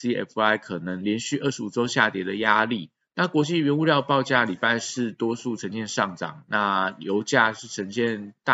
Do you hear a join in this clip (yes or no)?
yes